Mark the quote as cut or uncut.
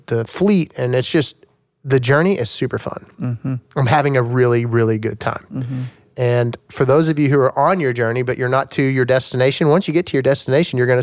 uncut